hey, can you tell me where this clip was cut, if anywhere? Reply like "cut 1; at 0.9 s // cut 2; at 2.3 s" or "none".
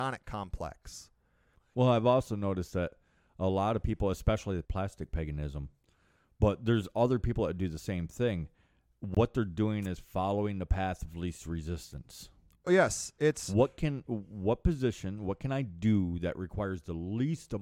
cut 1; at 1.7 s // cut 2; at 4.6 s